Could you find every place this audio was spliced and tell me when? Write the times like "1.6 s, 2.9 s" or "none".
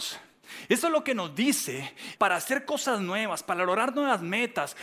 2.2 s